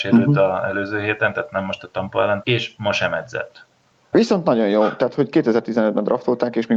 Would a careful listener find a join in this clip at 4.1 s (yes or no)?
yes